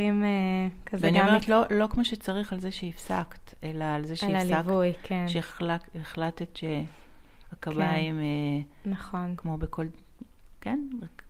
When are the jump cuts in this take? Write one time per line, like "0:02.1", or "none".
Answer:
none